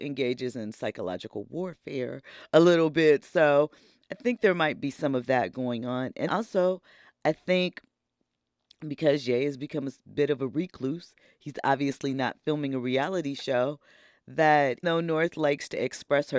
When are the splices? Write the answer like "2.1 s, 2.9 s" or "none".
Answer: 6.3 s, 14.8 s